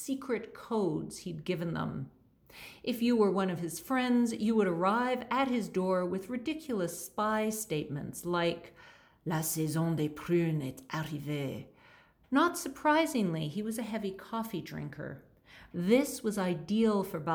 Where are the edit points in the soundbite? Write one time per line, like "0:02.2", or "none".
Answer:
0:12.2
0:15.7